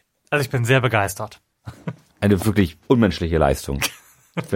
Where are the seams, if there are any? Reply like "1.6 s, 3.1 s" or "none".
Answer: 1.5 s, 2.8 s